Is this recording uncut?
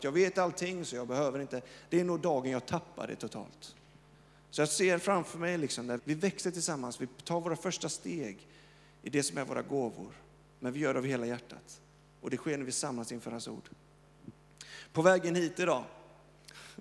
no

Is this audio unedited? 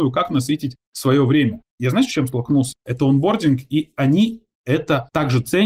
no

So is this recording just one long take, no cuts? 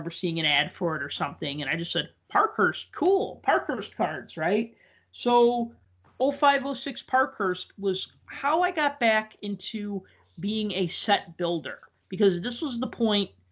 yes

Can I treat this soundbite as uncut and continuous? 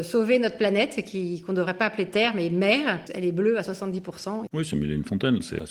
no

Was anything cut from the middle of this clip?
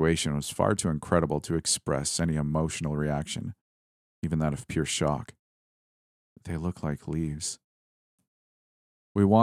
no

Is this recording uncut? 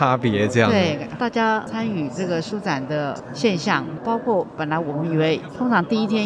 no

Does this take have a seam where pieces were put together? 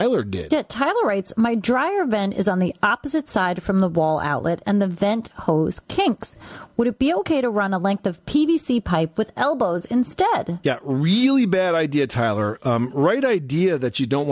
no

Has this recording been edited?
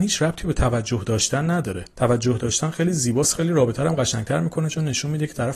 yes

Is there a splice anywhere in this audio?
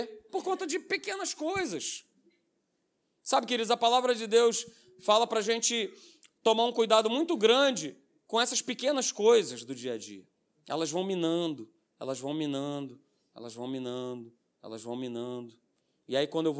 no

